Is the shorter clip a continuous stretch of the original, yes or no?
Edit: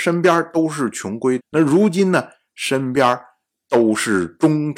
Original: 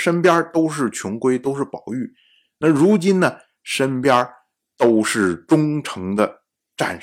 no